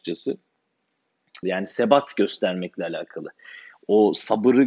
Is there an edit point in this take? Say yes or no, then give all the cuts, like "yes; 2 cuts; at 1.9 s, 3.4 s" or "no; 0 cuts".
yes; 1 cut; at 1.4 s